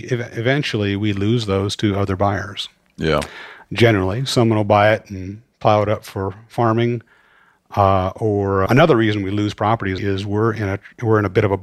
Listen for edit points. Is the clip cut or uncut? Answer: cut